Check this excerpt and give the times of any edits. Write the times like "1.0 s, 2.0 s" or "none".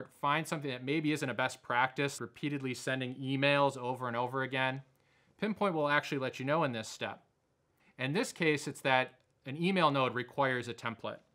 2.2 s, 7.8 s